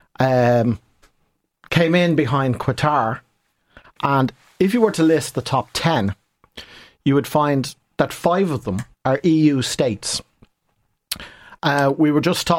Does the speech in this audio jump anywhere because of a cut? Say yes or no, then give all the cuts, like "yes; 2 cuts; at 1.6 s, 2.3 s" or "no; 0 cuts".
yes; 2 cuts; at 3.8 s, 8.9 s